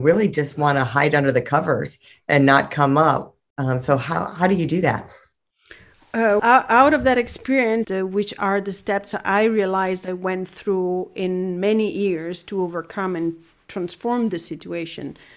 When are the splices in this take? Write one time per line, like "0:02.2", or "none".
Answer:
0:06.4
0:07.8

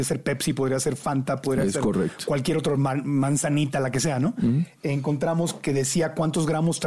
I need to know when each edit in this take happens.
none

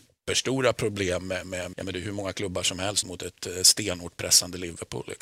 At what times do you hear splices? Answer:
0:01.7
0:03.0

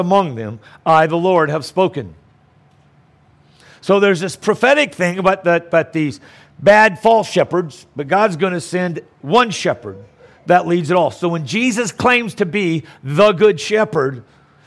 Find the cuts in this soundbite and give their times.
none

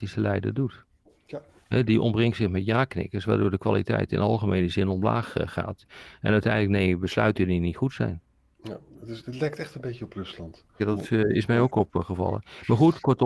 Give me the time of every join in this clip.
0:10.8

